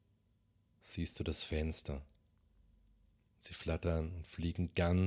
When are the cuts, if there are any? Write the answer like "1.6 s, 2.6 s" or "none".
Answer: 3.3 s